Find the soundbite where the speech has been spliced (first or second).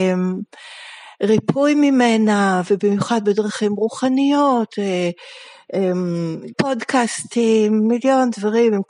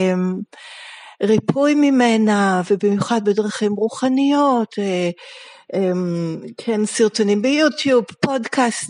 first